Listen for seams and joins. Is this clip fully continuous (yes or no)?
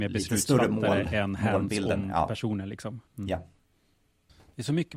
no